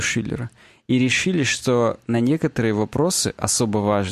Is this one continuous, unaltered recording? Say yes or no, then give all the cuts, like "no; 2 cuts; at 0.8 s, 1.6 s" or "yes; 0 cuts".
yes; 0 cuts